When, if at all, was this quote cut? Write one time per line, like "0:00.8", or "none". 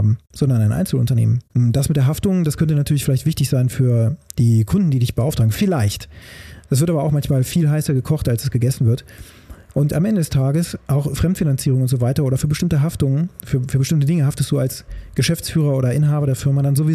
0:01.5